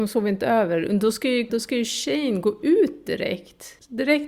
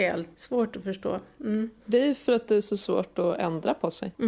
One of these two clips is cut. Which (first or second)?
first